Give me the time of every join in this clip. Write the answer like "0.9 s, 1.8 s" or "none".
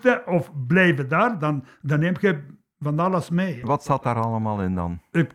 3.6 s